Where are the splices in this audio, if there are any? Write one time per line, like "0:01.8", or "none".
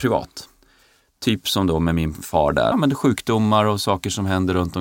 0:02.7